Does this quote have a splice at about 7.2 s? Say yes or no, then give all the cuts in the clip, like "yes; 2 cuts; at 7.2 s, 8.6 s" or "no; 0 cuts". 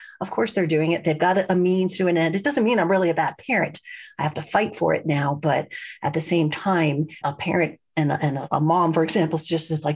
yes; 1 cut; at 7.2 s